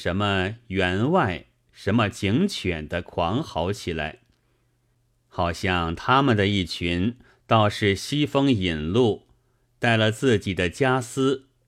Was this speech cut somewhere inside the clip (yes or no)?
no